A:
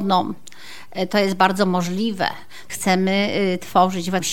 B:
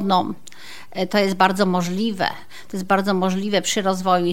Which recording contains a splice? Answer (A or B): A